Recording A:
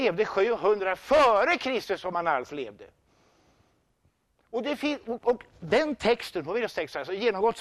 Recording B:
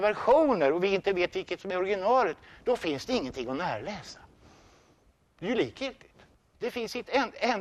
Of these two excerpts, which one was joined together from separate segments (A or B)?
B